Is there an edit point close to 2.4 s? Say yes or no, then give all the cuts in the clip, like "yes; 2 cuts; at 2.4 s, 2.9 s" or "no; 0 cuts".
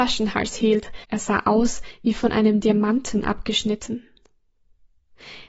no; 1 cut; at 1.0 s